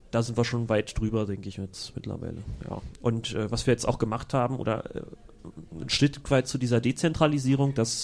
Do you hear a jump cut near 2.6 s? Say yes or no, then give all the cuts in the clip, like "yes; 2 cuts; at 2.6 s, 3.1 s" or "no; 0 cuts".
no; 0 cuts